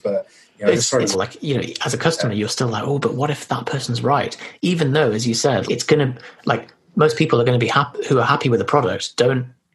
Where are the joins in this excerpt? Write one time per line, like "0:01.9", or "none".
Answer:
0:01.1
0:05.7